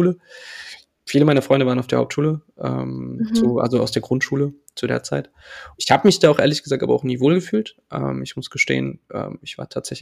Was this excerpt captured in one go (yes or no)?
no